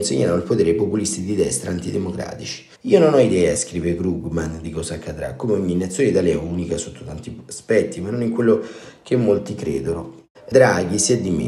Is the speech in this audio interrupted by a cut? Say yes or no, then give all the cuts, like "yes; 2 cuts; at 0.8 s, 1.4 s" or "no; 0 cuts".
yes; 2 cuts; at 2.7 s, 10.3 s